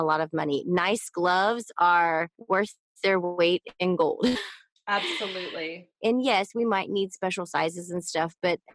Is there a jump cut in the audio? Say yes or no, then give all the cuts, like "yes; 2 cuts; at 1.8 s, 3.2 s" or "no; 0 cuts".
yes; 1 cut; at 5.9 s